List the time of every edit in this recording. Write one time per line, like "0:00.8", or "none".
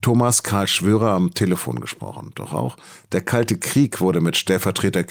0:02.3